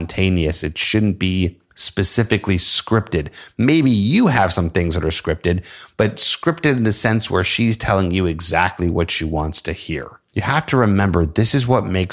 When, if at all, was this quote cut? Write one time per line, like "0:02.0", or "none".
0:01.7
0:10.3